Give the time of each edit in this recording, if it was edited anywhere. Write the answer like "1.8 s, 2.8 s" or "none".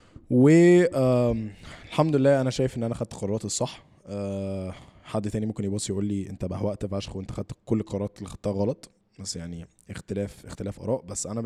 none